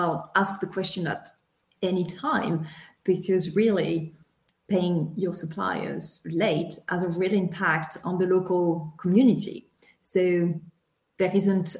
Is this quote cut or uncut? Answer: uncut